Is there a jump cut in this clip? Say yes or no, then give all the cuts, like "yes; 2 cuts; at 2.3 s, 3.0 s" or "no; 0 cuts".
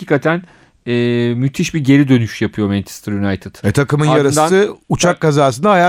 yes; 1 cut; at 3.6 s